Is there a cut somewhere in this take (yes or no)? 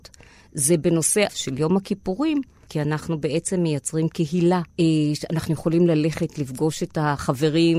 yes